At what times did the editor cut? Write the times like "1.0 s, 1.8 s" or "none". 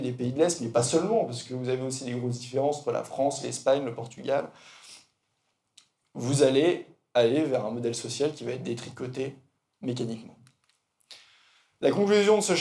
none